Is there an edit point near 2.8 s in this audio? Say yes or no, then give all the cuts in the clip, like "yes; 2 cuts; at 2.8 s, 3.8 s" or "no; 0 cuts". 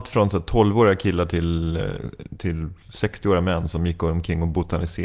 yes; 1 cut; at 2.8 s